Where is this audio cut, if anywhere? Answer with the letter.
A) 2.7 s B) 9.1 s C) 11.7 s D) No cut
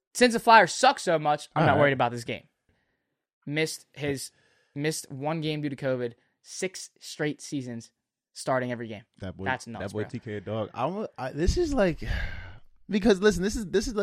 A